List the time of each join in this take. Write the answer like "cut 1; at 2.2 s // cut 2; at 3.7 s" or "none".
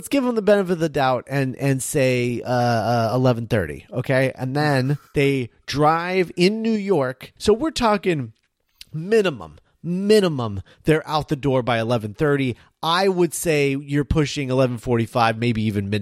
cut 1; at 5.1 s // cut 2; at 7.4 s